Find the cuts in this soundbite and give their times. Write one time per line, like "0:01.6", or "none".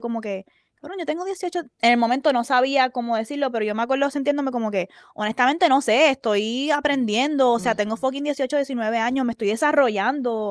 none